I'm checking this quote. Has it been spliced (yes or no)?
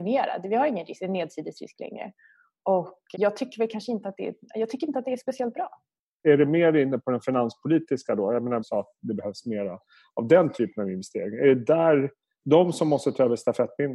yes